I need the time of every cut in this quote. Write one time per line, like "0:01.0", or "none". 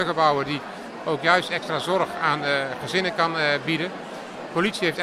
none